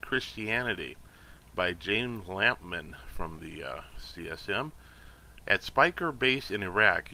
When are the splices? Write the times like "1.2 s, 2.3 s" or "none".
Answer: 5.4 s